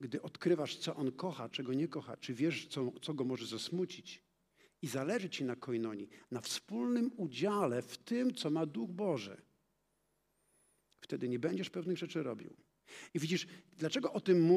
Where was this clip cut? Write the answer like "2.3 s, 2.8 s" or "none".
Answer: none

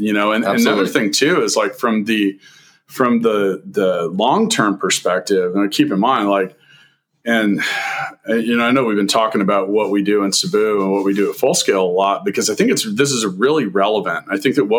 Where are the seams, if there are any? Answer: none

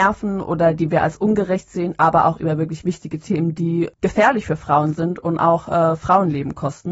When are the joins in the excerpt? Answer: none

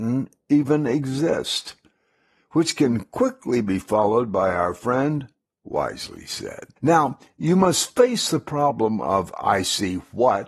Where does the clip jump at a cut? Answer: 5.5 s, 6.8 s

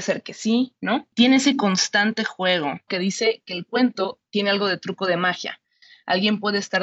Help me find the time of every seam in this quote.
2.9 s

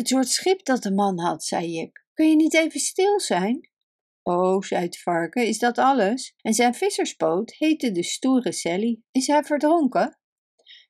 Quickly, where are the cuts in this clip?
6.4 s, 9.0 s

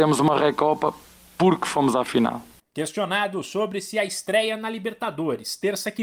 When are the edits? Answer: 2.6 s

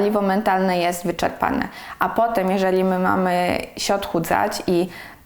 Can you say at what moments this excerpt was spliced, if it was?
none

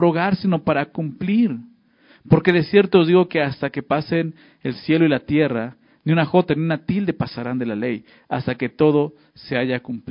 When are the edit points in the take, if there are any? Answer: none

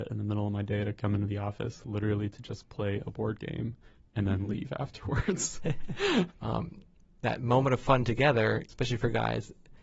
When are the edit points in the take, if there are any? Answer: 6.3 s, 8.6 s

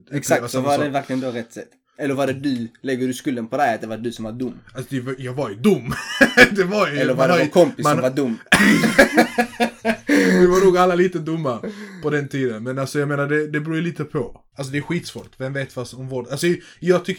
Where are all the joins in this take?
14.5 s

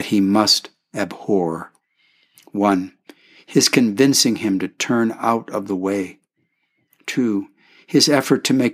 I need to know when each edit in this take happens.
none

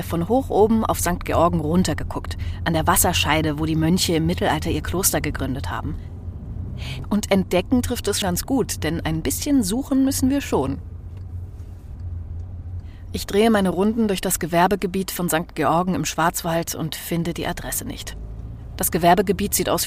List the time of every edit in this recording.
7.0 s, 8.2 s

